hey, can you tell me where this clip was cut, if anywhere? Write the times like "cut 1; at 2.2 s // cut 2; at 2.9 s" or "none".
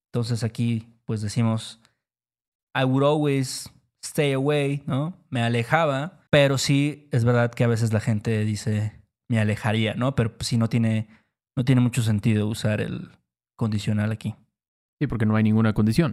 cut 1; at 6.3 s